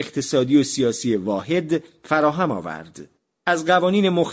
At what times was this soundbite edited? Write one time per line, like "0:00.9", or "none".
0:03.4